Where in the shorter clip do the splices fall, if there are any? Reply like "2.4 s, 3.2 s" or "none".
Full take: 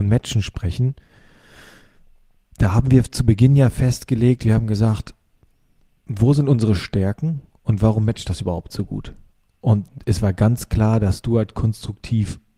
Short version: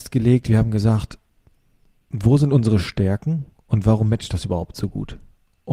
none